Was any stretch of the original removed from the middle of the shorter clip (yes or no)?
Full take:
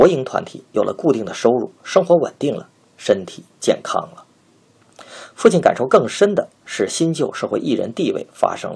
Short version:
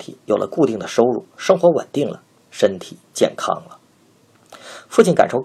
no